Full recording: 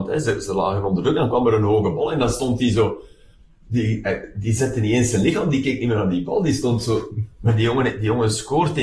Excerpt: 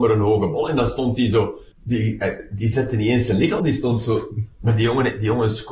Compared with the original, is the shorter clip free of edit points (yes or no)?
no